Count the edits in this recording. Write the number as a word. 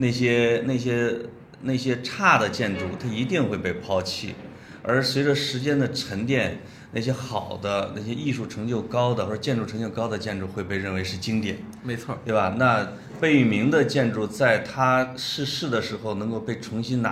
zero